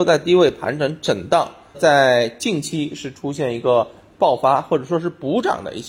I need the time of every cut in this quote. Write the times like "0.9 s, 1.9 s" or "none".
1.7 s